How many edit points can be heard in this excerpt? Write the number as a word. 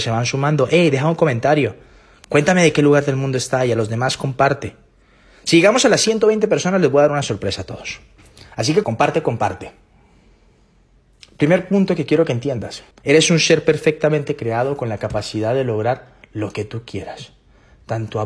two